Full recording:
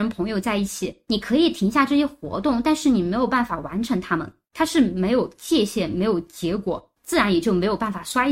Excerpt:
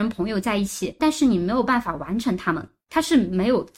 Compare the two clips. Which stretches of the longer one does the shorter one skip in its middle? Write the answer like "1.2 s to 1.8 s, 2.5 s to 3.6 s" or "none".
1.0 s to 2.6 s

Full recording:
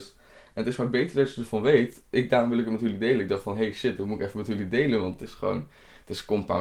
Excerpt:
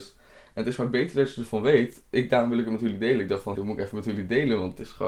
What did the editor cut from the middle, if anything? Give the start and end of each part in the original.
3.6 s to 4.0 s

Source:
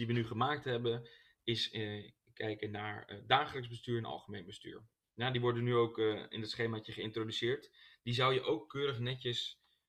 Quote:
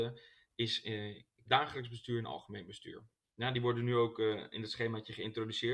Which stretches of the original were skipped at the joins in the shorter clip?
2.3 s to 3.2 s

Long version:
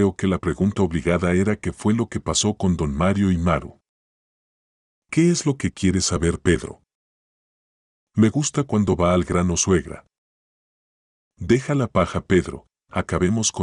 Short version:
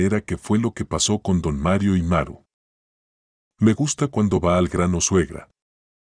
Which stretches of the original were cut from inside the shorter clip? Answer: 4.8 s to 8.0 s

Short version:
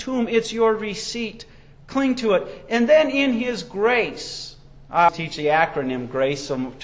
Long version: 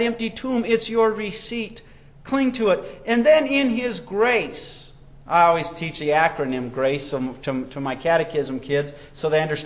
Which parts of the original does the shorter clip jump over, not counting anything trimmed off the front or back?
5.5 s to 5.7 s

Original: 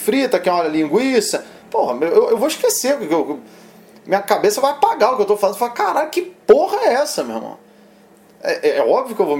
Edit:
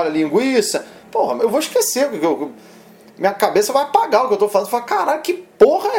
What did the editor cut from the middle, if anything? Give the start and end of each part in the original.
2.0 s to 2.3 s

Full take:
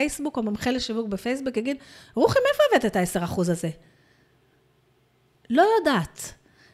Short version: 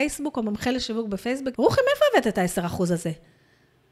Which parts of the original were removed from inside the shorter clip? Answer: 1.5 s to 2.1 s

